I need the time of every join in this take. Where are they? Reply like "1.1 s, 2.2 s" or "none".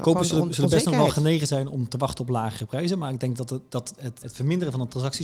4.2 s